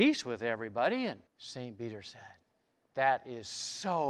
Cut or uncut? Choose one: cut